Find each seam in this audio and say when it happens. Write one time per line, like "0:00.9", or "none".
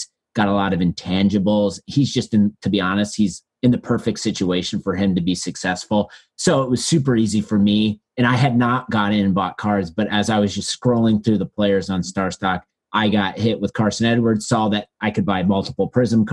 none